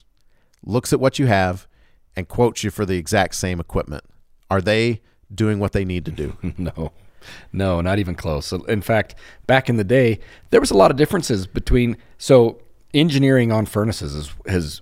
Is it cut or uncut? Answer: uncut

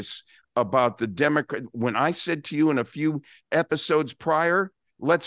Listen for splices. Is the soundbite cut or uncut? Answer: uncut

